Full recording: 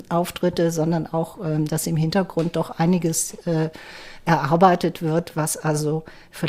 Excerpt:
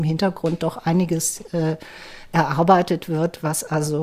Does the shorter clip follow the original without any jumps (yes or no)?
yes